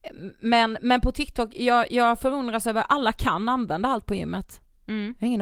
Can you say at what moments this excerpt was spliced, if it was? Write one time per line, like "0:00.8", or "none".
none